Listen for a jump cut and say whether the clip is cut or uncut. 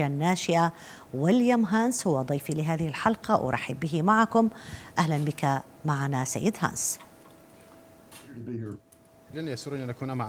uncut